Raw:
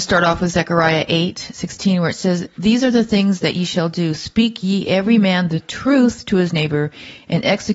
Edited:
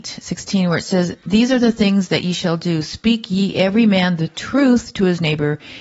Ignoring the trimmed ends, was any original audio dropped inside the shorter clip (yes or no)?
no